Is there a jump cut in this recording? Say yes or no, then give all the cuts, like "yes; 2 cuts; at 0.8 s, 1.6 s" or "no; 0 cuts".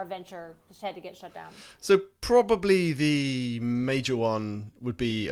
no; 0 cuts